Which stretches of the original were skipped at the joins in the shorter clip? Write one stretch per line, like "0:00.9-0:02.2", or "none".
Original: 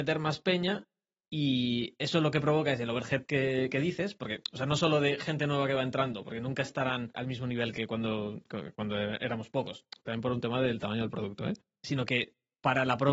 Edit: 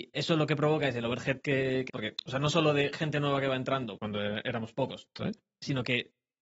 0:03.7-0:04.2
0:06.2-0:08.7
0:10.0-0:11.4